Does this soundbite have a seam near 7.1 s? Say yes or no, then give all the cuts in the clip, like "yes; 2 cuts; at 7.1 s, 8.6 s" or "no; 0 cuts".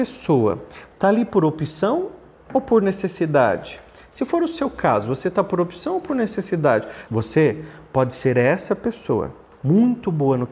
yes; 2 cuts; at 7.1 s, 9.5 s